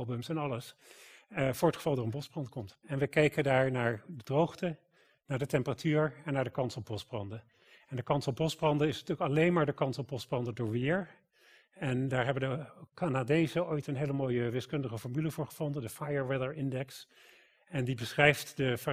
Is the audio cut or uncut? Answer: cut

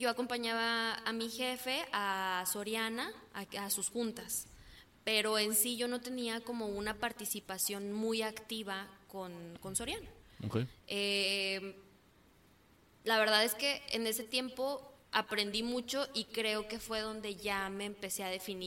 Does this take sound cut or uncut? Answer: uncut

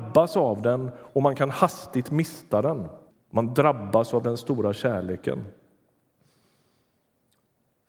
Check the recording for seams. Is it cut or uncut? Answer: cut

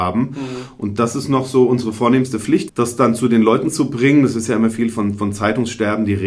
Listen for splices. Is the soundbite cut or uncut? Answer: cut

